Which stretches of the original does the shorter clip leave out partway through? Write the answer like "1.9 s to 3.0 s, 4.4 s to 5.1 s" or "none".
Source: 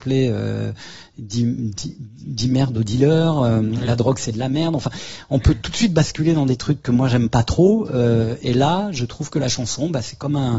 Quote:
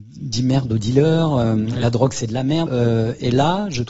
4.7 s to 7.9 s